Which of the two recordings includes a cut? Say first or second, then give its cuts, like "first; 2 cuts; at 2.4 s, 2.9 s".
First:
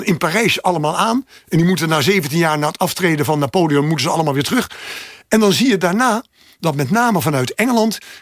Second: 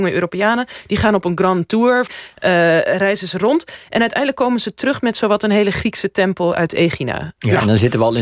second; 1 cut; at 2.1 s